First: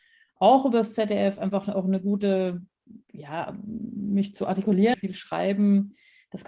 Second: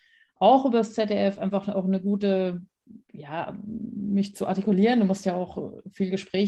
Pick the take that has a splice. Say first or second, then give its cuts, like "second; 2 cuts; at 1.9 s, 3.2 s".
first; 1 cut; at 4.9 s